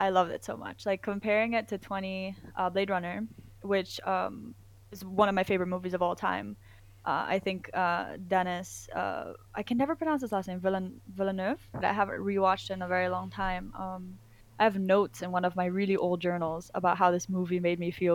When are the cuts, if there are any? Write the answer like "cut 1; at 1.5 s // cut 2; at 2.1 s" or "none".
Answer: cut 1; at 11.8 s